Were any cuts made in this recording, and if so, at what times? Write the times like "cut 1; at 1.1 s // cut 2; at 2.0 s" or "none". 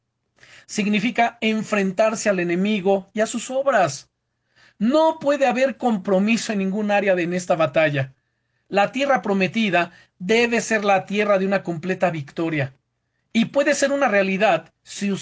none